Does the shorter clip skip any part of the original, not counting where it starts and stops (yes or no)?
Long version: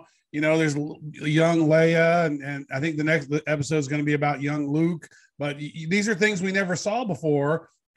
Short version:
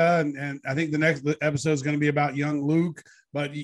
no